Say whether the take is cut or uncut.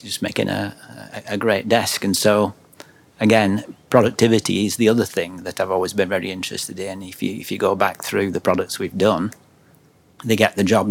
uncut